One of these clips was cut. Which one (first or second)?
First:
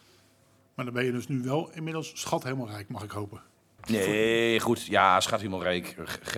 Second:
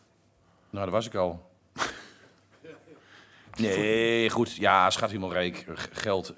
first